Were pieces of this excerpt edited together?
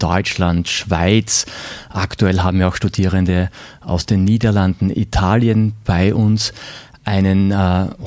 no; 0 cuts

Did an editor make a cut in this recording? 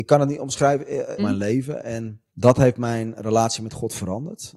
yes; 2 cuts; at 1.2 s, 2.3 s

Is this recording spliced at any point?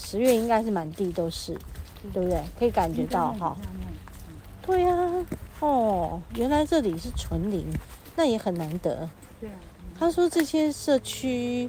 no; 0 cuts

